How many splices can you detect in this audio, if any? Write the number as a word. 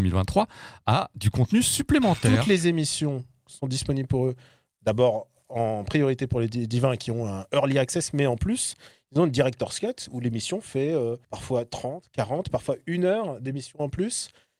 one